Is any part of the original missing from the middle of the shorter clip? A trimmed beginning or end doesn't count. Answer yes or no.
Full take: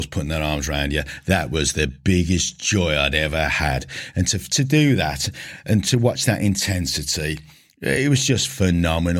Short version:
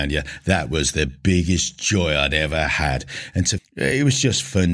yes